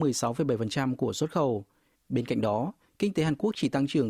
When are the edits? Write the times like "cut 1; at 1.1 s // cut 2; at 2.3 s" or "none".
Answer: cut 1; at 2.0 s